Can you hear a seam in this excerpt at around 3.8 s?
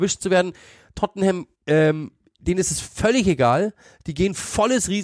no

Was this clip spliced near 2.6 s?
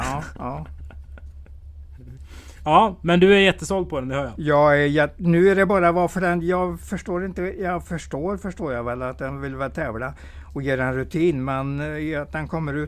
no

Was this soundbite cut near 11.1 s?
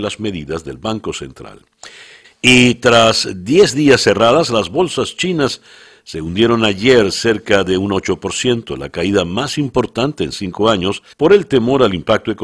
yes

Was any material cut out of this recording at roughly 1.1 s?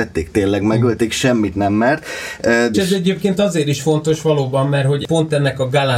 no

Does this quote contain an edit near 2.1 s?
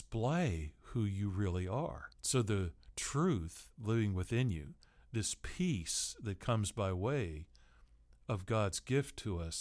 yes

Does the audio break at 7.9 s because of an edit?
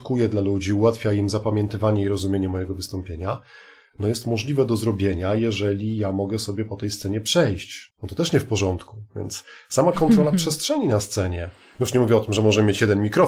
yes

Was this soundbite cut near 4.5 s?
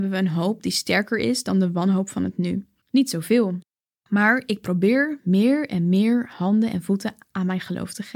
no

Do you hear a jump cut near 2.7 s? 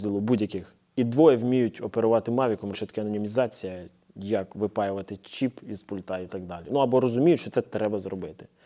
yes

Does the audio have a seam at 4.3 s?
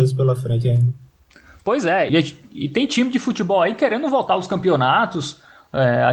no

